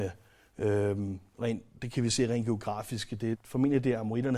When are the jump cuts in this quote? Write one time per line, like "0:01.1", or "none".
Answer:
0:03.3